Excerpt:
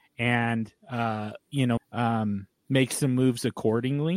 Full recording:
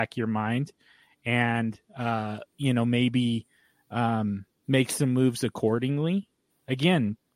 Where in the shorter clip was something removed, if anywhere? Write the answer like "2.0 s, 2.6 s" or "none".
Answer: 1.8 s